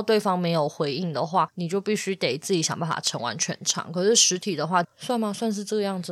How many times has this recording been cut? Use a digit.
1